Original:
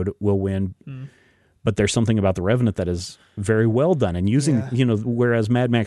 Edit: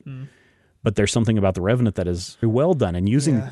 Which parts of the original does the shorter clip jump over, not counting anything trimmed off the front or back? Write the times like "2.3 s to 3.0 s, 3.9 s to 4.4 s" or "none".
3.2 s to 3.6 s